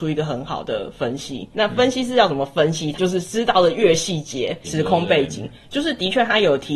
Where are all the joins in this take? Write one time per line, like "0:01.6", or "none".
0:01.5
0:02.9
0:04.6